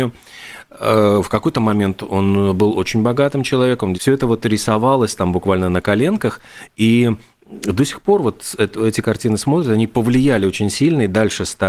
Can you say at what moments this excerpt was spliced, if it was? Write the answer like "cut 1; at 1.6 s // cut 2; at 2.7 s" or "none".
cut 1; at 3.9 s